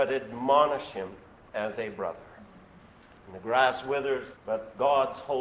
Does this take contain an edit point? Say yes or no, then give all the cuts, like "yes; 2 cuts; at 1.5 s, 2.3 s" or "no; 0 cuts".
yes; 1 cut; at 4.3 s